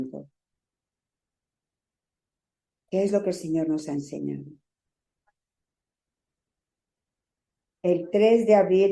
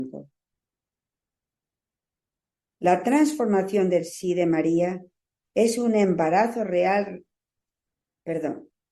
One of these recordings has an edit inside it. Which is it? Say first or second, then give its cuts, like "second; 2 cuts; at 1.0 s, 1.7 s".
second; 1 cut; at 2.7 s